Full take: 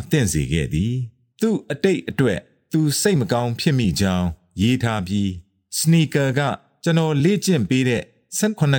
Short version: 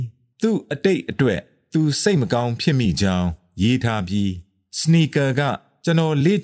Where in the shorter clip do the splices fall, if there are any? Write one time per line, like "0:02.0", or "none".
none

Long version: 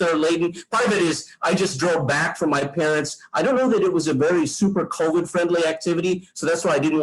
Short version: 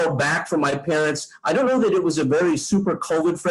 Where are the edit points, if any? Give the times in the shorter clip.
none

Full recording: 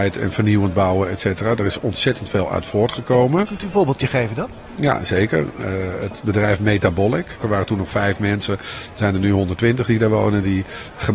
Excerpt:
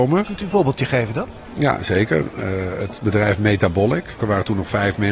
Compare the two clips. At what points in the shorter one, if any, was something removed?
none

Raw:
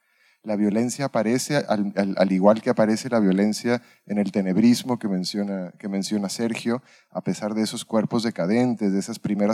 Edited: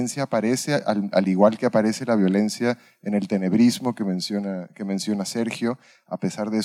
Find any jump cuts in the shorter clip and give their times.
0:01.1

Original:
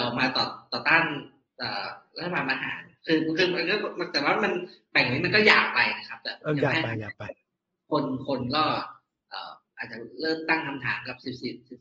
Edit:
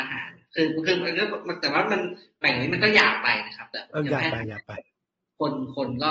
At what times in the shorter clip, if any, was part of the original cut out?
none

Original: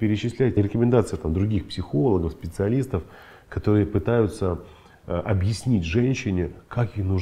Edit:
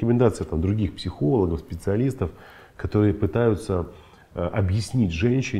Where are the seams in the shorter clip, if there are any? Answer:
none

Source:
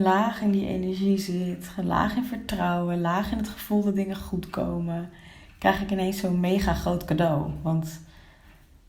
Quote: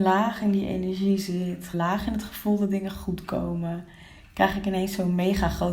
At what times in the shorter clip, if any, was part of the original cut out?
0:01.7

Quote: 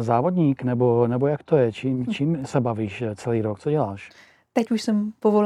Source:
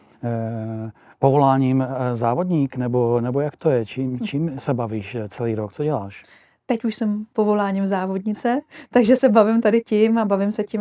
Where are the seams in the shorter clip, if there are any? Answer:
none

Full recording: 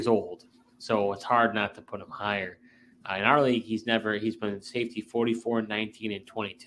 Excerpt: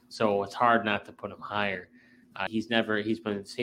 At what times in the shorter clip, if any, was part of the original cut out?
0:02.5

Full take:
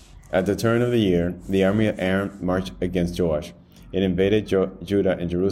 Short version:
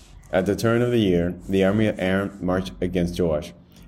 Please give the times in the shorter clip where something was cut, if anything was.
none

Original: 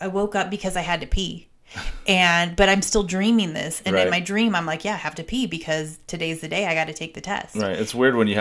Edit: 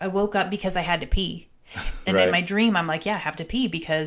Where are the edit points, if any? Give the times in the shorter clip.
0:02.0

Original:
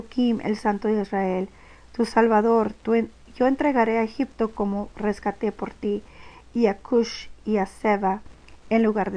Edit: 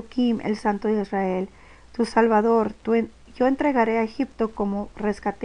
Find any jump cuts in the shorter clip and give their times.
none

